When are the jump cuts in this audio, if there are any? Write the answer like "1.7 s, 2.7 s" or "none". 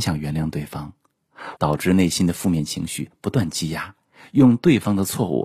1.6 s

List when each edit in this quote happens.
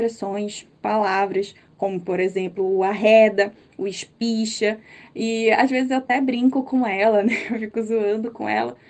none

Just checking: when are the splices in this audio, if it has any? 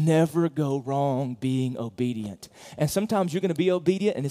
none

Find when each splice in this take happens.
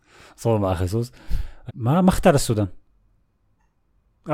1.7 s

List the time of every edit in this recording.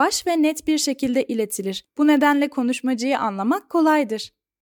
none

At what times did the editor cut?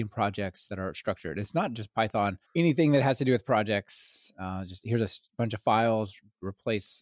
2.4 s

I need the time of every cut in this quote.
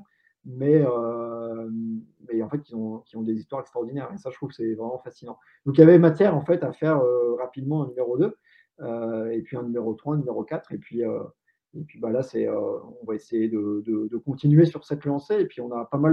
none

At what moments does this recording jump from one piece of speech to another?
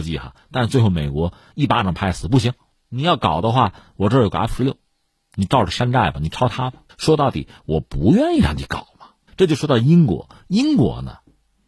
6.9 s, 9.3 s

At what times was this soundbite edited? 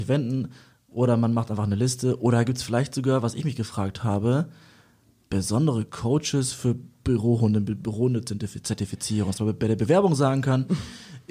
none

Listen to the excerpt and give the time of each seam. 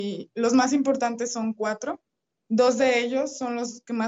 none

